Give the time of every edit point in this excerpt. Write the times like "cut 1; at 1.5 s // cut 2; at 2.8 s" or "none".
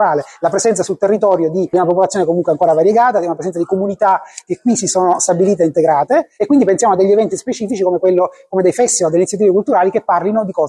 cut 1; at 6.4 s